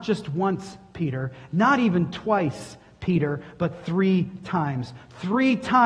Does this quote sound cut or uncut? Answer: uncut